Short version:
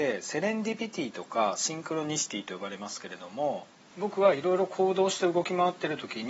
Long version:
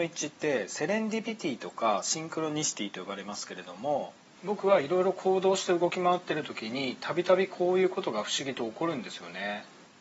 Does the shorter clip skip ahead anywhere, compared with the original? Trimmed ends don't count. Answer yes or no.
no